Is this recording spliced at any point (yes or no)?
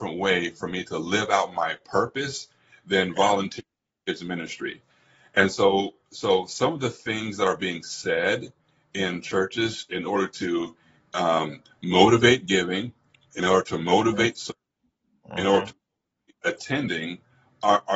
no